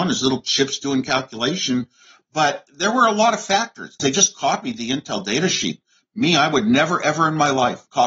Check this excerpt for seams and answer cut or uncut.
cut